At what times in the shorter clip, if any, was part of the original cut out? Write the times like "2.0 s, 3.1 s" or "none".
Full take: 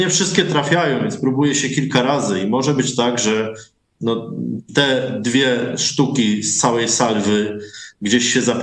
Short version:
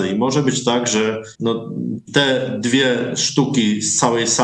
1.3 s